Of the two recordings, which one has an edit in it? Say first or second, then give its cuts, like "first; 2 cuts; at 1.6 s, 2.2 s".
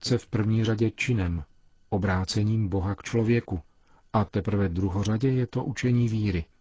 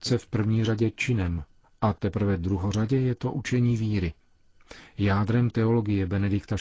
second; 1 cut; at 1.6 s